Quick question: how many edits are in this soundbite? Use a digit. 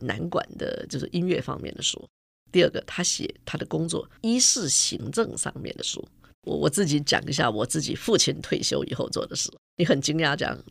1